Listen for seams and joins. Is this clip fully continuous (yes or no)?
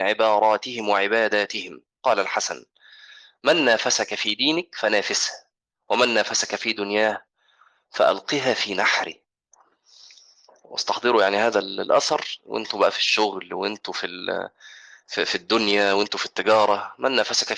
yes